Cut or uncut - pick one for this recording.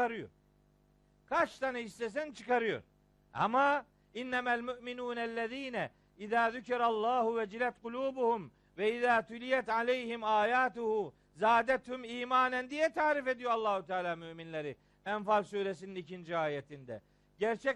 uncut